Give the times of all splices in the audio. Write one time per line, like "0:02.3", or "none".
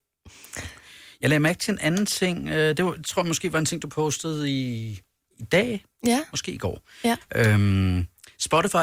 none